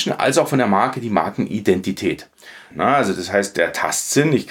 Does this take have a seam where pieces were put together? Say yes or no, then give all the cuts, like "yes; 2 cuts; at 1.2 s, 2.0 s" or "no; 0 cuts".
yes; 1 cut; at 2.7 s